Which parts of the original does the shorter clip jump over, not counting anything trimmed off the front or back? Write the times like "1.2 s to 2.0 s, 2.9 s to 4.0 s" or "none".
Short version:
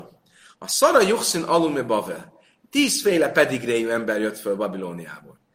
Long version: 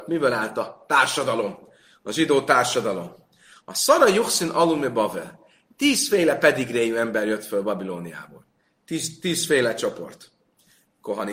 none